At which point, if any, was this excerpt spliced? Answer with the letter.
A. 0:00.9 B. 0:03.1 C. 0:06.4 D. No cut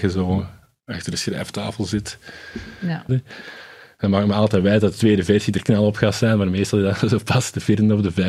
B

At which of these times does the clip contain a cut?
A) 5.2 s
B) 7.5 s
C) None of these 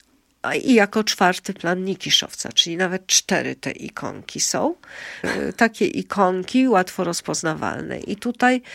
A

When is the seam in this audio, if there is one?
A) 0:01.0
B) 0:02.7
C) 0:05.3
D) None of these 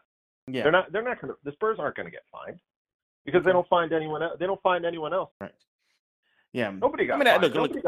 C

